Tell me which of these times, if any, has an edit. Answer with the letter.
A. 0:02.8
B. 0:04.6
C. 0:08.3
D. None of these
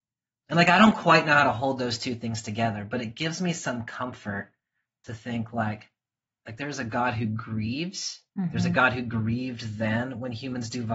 C